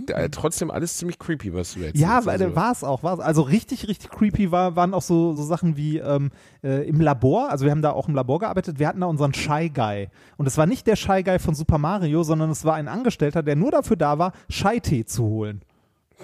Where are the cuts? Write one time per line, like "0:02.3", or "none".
0:05.4